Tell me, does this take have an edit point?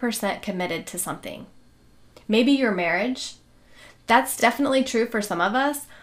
no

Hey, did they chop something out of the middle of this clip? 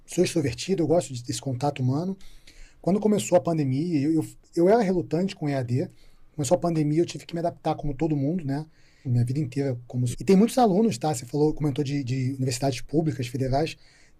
yes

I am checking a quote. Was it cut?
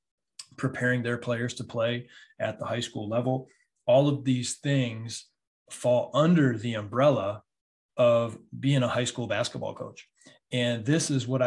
no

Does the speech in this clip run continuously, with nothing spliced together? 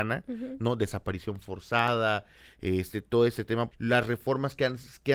no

